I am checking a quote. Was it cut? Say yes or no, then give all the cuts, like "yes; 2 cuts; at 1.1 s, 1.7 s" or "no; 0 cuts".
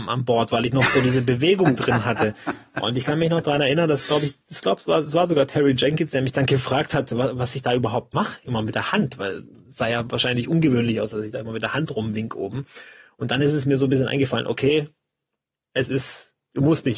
no; 0 cuts